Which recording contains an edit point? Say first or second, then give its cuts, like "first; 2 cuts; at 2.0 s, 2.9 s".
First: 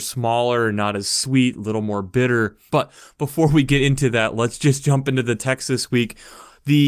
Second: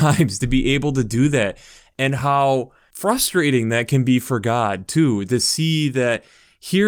first; 1 cut; at 2.7 s